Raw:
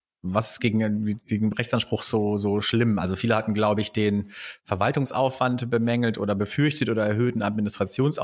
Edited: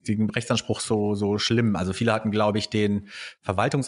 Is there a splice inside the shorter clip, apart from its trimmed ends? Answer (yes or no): no